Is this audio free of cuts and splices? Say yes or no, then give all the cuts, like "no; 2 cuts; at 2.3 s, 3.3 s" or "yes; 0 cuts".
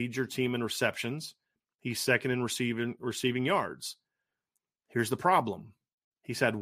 yes; 0 cuts